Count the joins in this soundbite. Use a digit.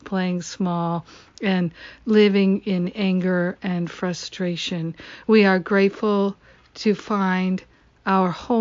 1